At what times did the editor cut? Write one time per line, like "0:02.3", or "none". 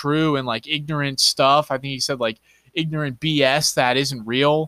none